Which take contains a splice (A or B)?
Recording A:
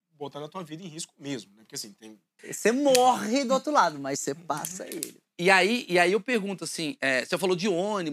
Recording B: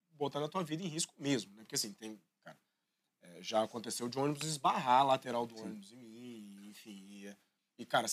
A